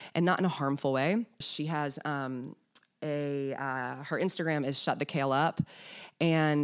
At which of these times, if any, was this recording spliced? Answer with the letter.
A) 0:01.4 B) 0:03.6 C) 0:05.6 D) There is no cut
A